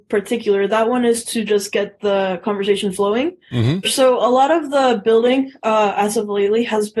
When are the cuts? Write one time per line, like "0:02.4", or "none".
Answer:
0:03.8